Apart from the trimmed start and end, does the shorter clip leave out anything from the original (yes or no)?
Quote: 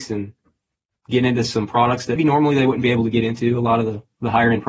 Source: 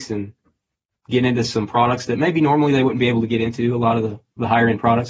yes